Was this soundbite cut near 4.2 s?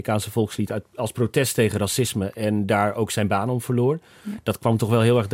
yes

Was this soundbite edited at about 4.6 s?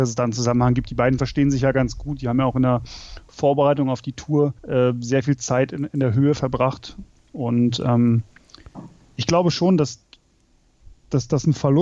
yes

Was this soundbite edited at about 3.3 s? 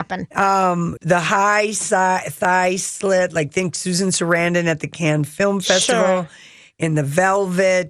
no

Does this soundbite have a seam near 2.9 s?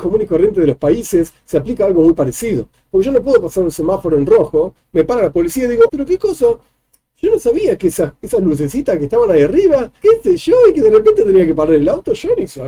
no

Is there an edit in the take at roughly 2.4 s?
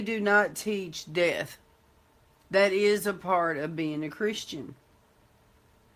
yes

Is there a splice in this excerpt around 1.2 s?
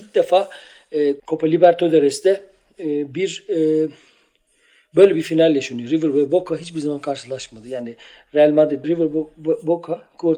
yes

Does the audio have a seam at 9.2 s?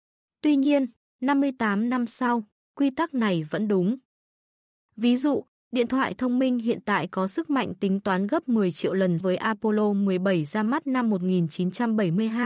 yes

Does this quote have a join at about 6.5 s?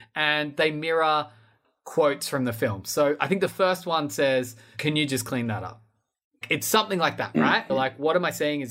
no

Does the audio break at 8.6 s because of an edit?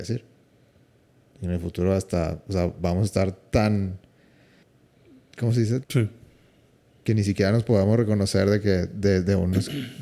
no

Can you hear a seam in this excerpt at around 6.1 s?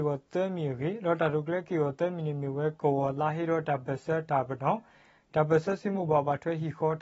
no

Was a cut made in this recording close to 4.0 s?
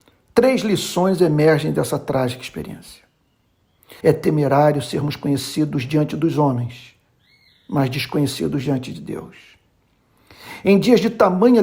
yes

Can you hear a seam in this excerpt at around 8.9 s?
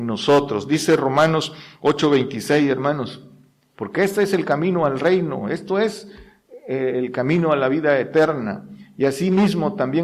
no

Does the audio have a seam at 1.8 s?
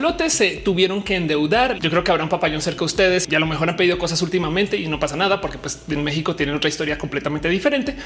yes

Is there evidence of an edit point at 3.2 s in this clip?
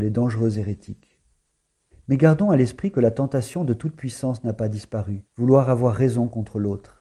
no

